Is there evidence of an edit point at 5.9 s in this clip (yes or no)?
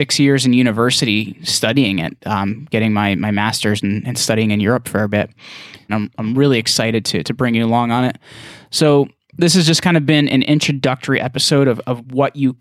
yes